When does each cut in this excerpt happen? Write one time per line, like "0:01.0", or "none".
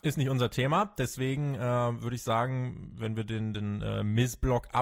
none